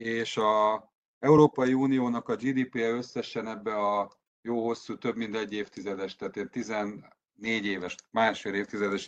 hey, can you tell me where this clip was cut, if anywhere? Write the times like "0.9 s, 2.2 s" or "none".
none